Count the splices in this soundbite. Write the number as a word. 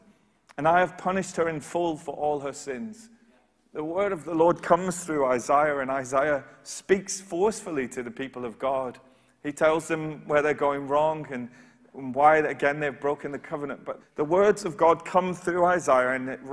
one